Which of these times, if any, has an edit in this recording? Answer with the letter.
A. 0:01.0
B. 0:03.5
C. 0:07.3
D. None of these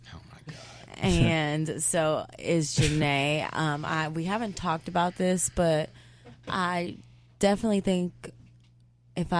D